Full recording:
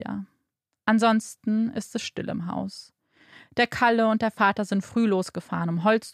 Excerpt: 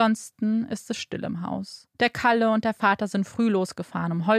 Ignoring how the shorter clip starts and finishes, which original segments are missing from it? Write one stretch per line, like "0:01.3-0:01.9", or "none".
0:03.0-0:03.5

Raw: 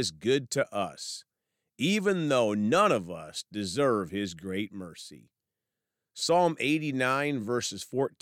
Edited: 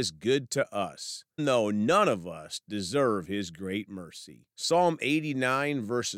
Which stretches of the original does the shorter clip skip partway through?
0:01.4-0:02.2
0:05.3-0:06.1

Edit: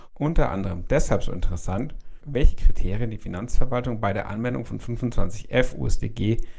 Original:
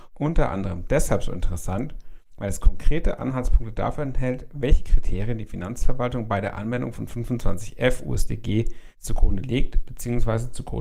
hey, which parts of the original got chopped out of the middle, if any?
0:02.2-0:04.5

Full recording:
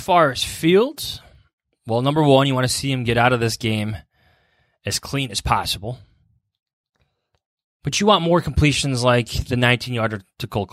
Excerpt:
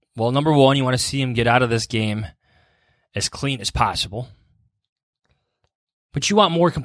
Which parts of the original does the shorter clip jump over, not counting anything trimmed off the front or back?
none

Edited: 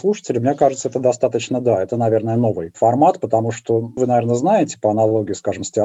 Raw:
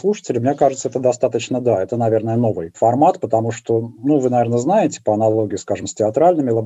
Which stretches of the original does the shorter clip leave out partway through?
0:04.0-0:04.2

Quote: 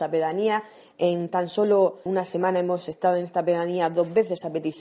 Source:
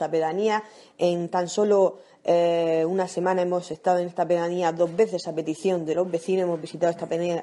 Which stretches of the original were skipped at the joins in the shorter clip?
0:02.1-0:02.9

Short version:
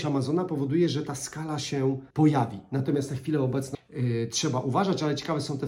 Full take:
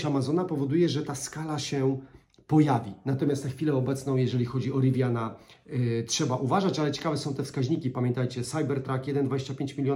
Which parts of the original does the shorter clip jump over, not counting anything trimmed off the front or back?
0:02.1-0:02.4
0:04.1-0:05.5

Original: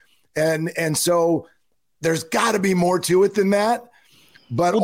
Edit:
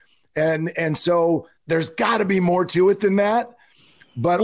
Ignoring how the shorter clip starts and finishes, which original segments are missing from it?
0:01.6-0:01.9

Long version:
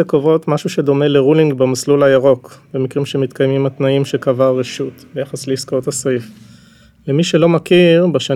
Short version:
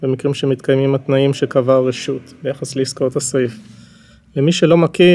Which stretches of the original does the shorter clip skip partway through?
none

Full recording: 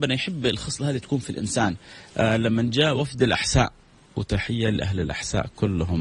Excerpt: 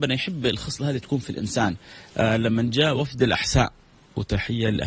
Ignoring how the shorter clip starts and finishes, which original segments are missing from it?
none

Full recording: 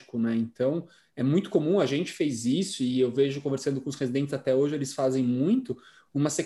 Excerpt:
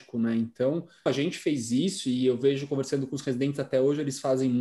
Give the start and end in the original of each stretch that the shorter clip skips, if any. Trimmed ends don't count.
0:01.1-0:01.8

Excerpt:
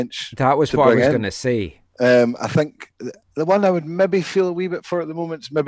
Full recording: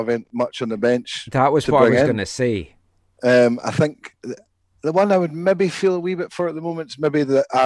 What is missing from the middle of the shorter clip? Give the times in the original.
0:02.8-0:03.1
0:04.5-0:04.7

